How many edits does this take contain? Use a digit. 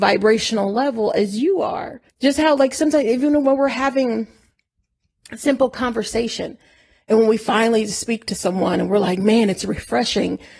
1